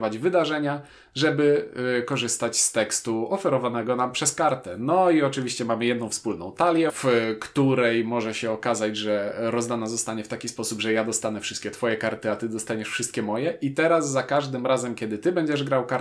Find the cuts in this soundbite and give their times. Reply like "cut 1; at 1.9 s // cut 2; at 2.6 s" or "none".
cut 1; at 6.9 s